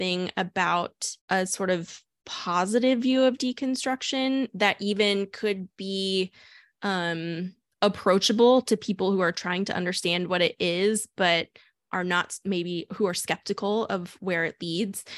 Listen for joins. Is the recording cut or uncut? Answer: cut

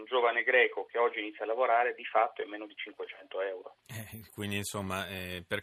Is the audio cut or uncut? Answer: cut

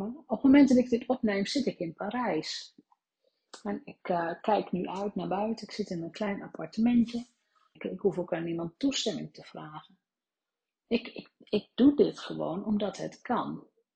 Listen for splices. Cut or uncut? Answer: cut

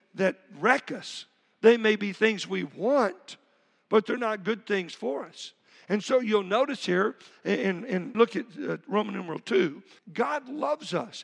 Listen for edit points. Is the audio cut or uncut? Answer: cut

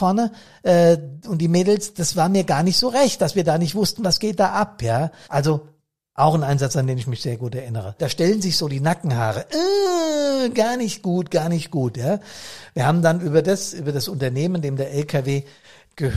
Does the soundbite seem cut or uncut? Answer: cut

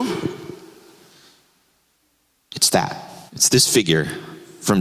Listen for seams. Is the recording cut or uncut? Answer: cut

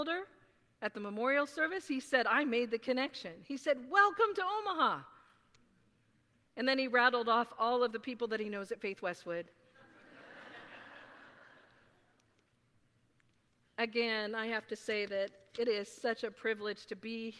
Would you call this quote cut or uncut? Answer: uncut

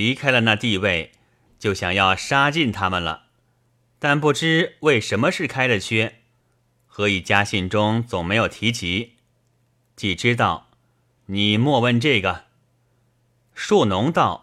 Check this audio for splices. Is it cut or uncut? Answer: cut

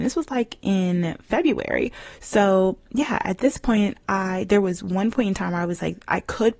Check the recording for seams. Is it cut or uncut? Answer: uncut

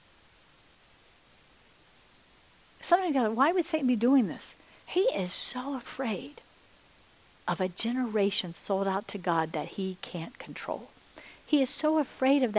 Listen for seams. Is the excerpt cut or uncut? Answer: cut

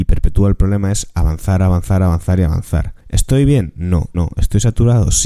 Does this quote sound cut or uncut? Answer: cut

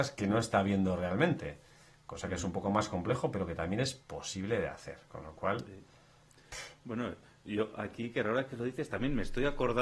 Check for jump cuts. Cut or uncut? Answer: uncut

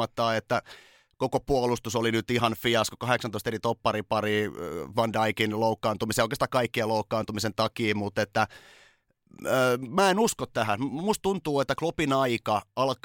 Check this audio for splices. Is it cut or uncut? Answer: uncut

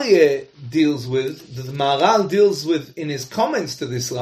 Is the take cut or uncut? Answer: uncut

